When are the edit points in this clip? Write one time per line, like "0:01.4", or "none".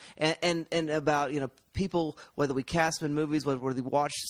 none